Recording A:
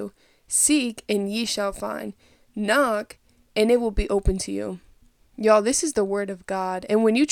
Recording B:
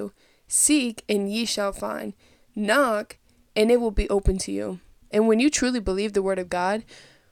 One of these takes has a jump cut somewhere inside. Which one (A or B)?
B